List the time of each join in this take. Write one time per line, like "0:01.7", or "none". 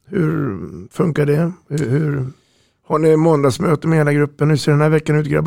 none

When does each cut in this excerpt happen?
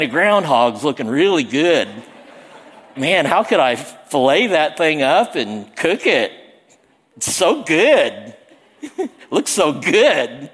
0:02.9

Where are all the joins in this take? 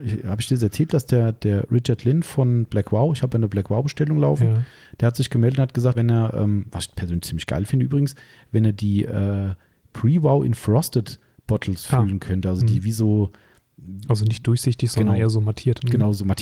0:05.9

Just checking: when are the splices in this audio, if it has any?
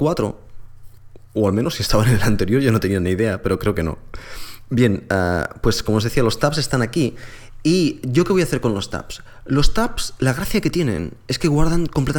none

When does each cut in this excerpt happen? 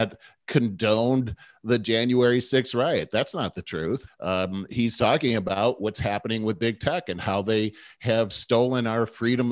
0:04.1
0:08.3

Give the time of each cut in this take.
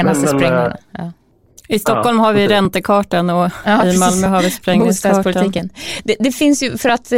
none

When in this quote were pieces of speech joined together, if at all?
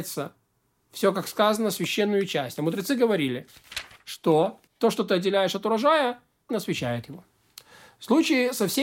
0:04.7
0:06.5

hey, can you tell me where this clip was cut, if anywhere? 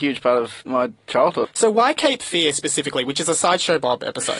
0:01.4

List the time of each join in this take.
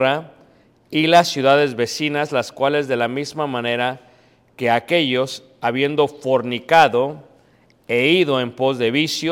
none

